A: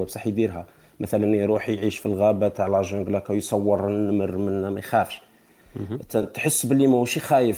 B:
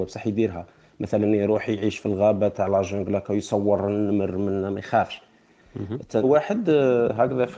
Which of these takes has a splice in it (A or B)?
B